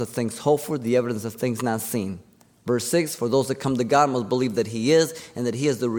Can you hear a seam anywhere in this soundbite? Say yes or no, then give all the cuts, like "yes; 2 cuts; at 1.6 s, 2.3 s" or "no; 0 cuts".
no; 0 cuts